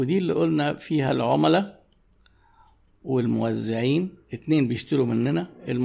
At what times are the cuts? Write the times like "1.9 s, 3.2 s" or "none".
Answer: 4.2 s